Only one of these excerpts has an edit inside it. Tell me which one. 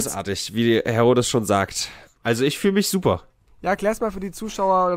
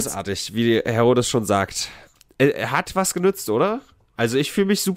first; 1 cut; at 2.1 s

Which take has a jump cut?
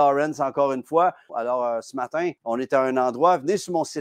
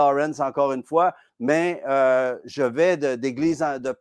first; 2 cuts; at 1.3 s, 2.4 s

